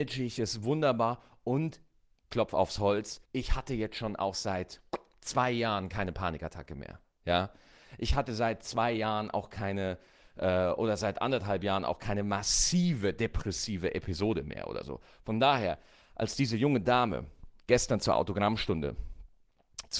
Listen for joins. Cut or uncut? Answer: cut